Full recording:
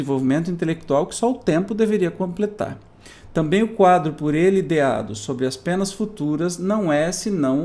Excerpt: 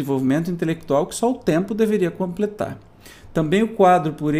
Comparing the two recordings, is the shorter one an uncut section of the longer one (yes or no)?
yes